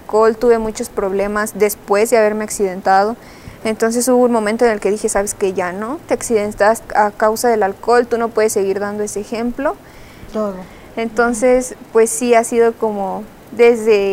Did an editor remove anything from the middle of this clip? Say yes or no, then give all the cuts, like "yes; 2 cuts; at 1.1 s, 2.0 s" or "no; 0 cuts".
yes; 2 cuts; at 6.9 s, 10.3 s